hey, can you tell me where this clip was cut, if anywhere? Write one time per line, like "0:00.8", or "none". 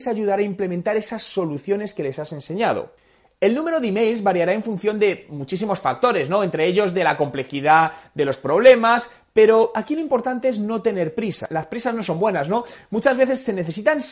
none